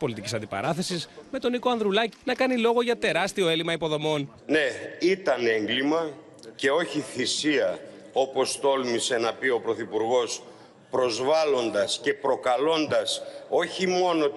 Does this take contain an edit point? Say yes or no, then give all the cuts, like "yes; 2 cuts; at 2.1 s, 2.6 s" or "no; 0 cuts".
yes; 2 cuts; at 2.1 s, 4.4 s